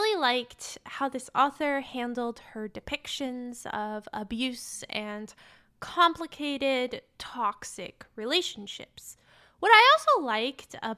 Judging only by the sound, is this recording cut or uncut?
uncut